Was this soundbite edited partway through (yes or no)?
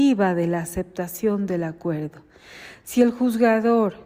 no